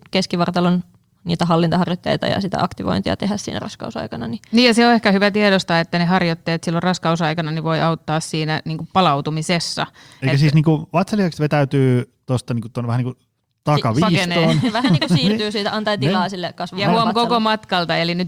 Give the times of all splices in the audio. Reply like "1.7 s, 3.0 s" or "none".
none

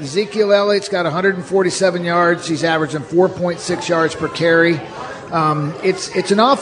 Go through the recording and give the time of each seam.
none

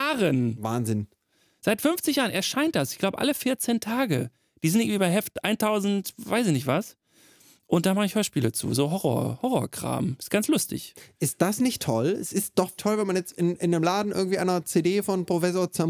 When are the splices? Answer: 12.8 s

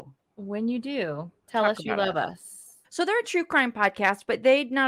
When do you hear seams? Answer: 1.4 s, 2.8 s

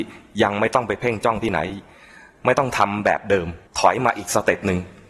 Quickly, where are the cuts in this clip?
3.7 s

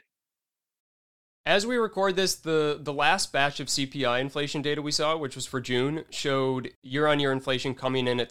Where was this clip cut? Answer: none

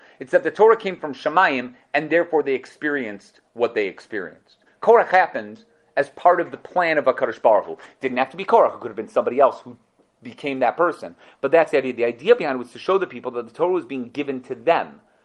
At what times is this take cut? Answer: 4.7 s

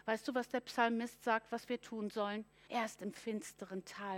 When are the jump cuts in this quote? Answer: 2.7 s

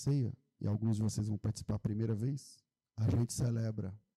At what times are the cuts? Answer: 2.8 s

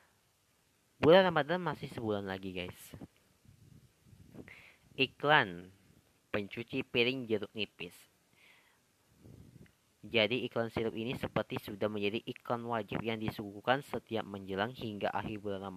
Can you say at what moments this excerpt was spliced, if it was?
10.0 s

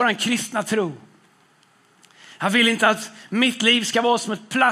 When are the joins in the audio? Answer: none

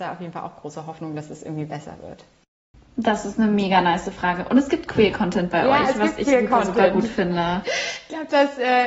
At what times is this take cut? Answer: 7.6 s

